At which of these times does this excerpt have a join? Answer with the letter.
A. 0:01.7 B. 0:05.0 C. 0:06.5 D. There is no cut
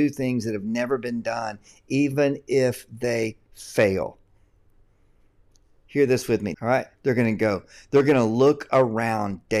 C